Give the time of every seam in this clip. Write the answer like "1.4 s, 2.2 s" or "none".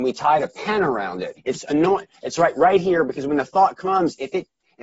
1.4 s